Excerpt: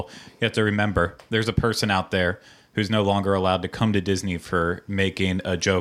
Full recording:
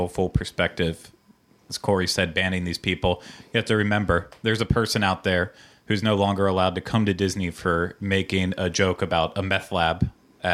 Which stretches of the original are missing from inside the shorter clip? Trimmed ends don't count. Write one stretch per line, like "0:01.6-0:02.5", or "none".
none